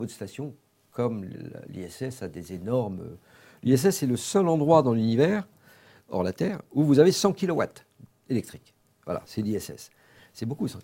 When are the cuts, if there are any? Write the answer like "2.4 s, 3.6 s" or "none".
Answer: none